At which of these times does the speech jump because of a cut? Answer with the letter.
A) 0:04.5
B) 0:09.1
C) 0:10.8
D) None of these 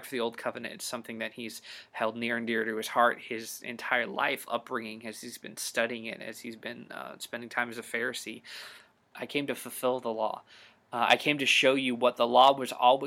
B